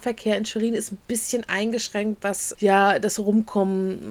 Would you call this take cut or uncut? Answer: cut